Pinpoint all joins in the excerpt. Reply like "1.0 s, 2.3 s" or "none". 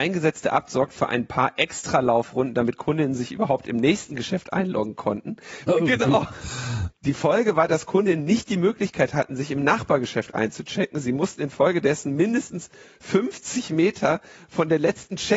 5.7 s, 6.9 s